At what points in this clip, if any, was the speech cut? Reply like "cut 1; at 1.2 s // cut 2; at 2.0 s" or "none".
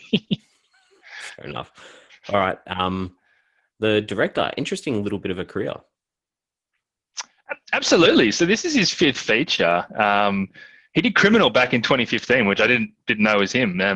none